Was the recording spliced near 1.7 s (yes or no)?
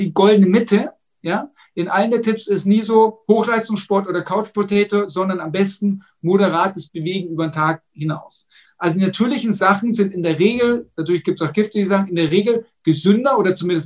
no